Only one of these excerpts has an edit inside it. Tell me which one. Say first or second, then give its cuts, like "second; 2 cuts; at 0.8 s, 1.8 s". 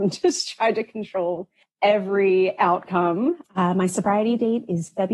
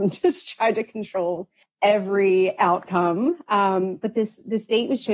first; 1 cut; at 3.4 s